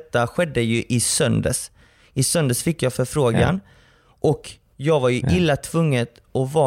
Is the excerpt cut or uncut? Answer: uncut